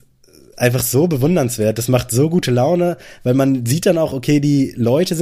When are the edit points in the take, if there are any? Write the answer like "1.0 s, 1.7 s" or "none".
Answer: none

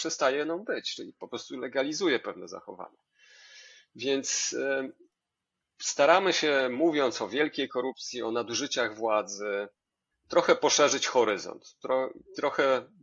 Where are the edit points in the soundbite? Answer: 10.1 s

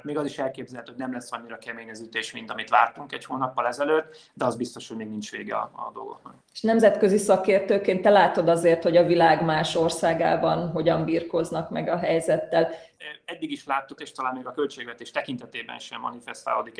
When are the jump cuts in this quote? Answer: 6.4 s, 13.0 s, 14.0 s

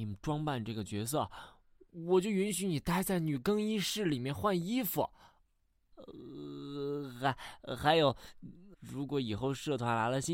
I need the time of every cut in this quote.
8.7 s

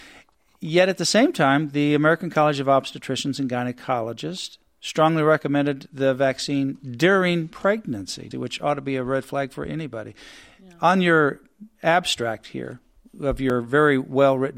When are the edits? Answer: 8.3 s

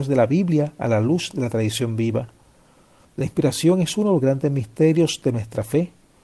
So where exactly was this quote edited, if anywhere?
3.0 s

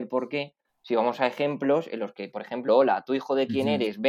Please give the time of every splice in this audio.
2.7 s

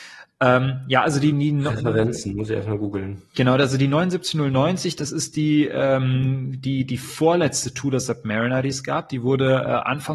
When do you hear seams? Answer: none

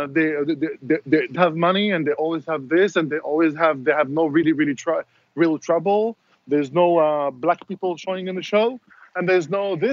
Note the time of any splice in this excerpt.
1.3 s

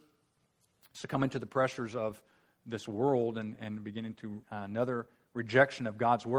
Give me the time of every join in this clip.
4.4 s

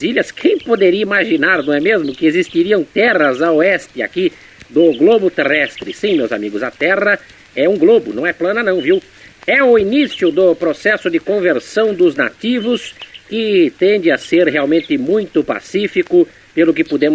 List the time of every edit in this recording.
none

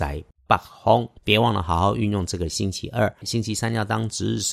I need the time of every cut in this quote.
1.2 s, 3.2 s

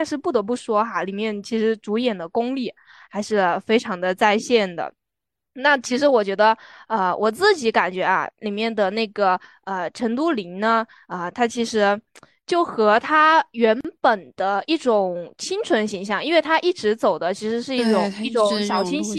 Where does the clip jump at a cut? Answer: none

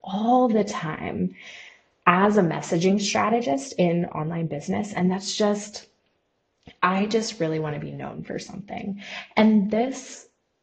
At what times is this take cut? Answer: none

